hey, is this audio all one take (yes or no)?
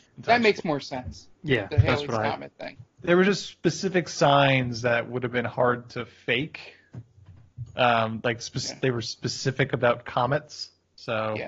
yes